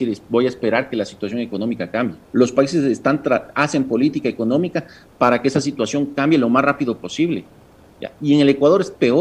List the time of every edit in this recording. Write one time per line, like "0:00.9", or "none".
0:02.3